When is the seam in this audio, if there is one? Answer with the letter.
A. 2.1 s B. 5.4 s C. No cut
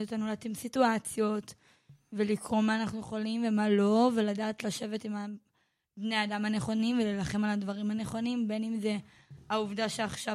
C